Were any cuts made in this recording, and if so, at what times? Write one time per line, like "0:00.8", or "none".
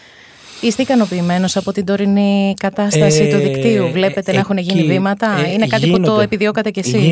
none